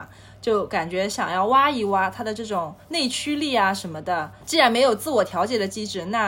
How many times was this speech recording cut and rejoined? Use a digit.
1